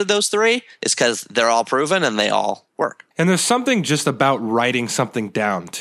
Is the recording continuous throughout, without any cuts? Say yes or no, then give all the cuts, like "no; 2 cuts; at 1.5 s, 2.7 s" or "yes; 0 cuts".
no; 1 cut; at 3.1 s